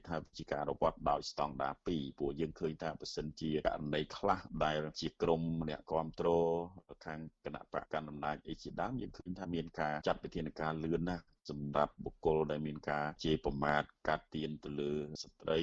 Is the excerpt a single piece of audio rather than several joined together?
no; 1 cut; at 7.8 s

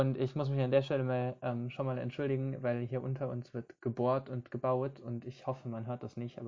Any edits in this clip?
no; 0 cuts

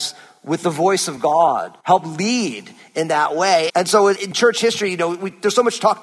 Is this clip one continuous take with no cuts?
no; 2 cuts; at 1.8 s, 3.7 s

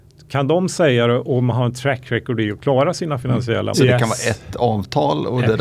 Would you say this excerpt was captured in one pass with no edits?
no; 1 cut; at 3.7 s

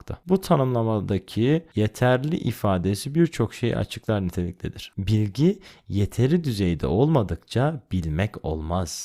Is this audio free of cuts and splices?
yes; 0 cuts

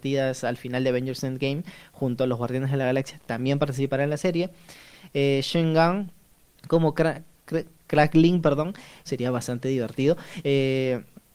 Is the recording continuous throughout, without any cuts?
no; 2 cuts; at 9.1 s, 10.4 s

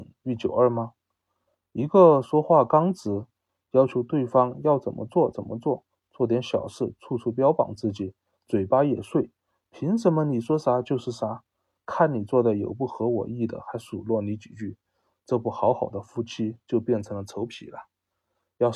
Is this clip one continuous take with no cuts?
yes; 0 cuts

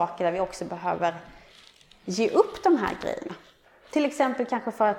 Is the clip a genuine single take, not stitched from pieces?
yes; 0 cuts

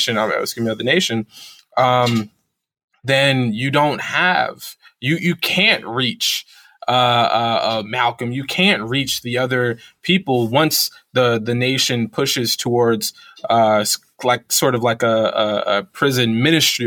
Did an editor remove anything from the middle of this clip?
no; 0 cuts

